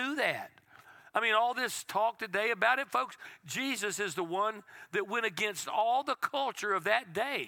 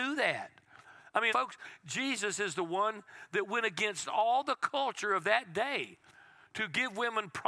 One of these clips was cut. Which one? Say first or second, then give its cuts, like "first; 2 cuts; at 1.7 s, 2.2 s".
second; 1 cut; at 1.3 s